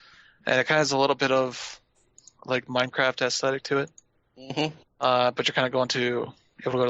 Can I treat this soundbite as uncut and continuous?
yes; 0 cuts

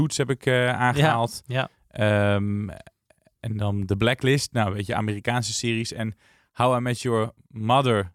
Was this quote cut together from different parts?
no; 0 cuts

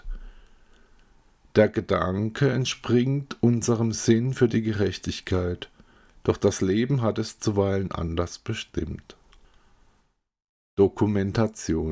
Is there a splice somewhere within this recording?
no; 0 cuts

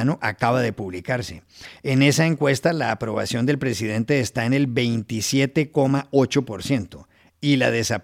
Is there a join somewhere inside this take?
no; 0 cuts

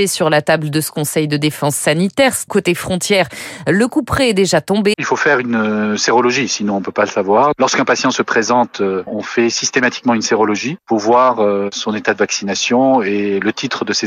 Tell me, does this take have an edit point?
yes; 2 cuts; at 2.5 s, 4.9 s

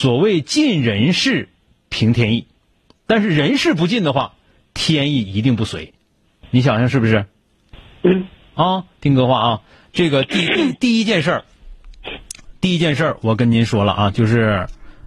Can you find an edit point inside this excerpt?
no; 0 cuts

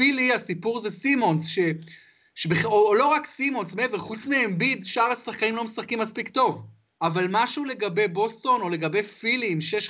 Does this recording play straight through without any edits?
no; 1 cut; at 7.0 s

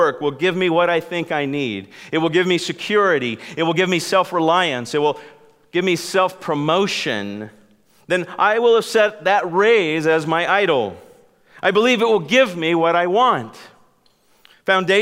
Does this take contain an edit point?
no; 0 cuts

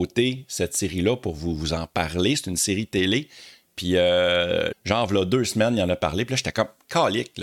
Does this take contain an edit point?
yes; 1 cut; at 4.7 s

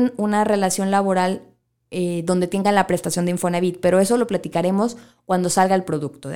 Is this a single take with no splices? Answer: yes; 0 cuts

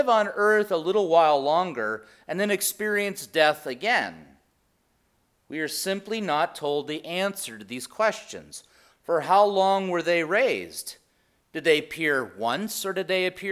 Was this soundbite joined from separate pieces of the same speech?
yes; 1 cut; at 8.9 s

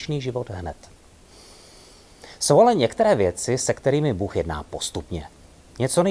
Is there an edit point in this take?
no; 0 cuts

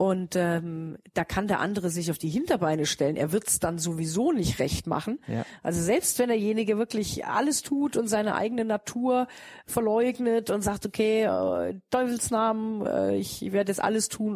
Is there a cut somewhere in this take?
no; 0 cuts

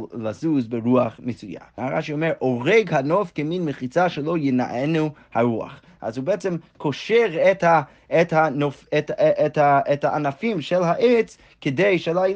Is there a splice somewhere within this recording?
yes; 1 cut; at 1.8 s

